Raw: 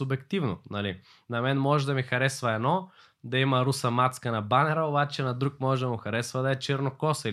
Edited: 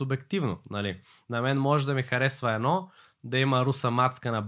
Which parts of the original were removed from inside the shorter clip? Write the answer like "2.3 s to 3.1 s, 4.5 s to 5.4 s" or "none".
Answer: none